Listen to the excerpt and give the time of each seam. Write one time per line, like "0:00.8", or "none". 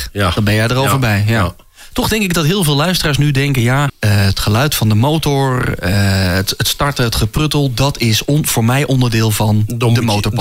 0:03.9